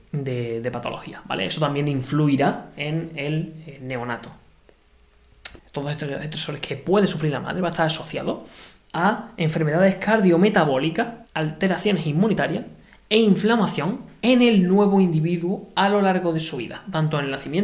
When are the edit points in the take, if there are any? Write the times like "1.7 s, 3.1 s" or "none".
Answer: 5.6 s, 11.3 s